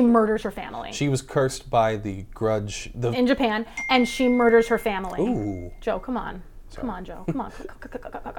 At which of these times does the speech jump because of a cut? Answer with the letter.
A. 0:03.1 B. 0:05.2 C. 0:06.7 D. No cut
A